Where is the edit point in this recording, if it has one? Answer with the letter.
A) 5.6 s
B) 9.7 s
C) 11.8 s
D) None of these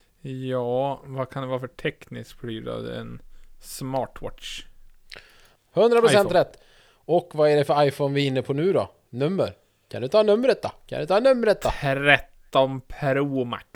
A